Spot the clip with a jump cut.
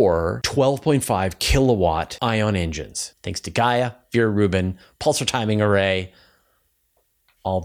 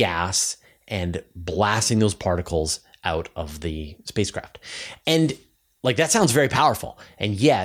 first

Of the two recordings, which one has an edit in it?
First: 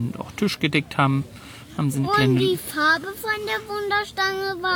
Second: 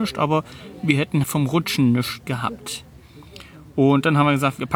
second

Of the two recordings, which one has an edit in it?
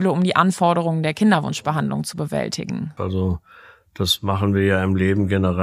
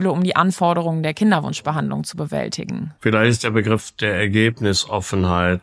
first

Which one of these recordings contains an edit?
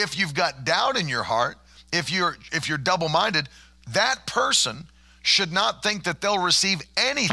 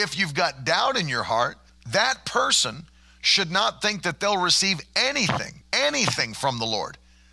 second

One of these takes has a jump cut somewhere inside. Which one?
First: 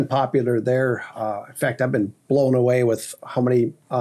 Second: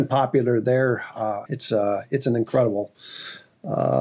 second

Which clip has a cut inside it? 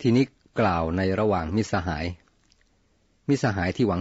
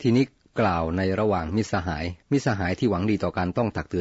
second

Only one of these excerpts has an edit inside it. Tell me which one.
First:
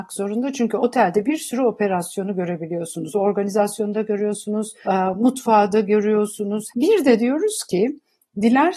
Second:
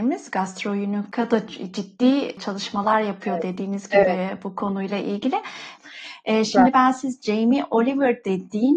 first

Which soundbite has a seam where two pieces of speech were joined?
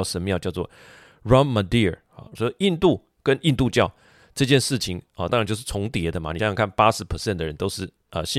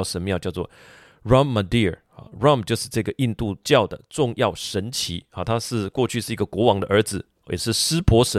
first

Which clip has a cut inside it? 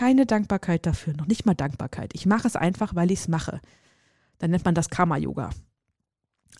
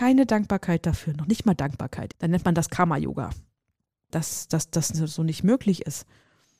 second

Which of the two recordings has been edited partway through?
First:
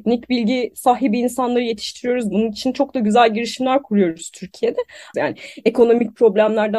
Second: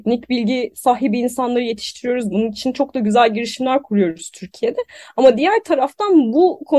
first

